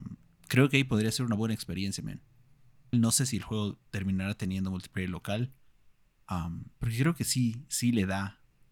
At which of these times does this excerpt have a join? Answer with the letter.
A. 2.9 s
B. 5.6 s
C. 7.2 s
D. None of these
A